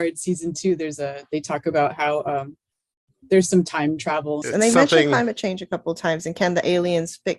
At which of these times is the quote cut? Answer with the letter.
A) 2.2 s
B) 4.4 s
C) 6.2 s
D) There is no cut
B